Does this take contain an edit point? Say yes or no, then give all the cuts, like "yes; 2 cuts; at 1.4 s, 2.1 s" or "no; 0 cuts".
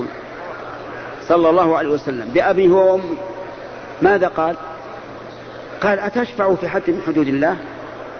no; 0 cuts